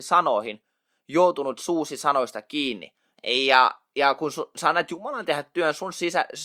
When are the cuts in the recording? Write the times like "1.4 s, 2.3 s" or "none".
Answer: 3.1 s